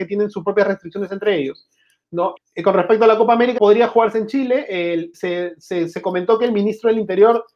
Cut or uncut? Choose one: cut